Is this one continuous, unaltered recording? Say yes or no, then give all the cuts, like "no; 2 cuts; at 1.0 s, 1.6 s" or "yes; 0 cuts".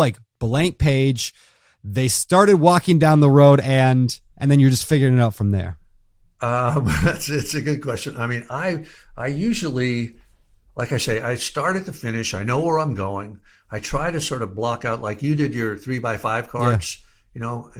yes; 0 cuts